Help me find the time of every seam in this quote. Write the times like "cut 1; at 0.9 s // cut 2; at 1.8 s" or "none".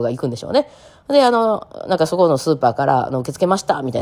none